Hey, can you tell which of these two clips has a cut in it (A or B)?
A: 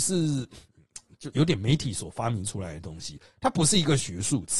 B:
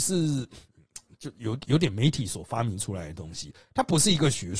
A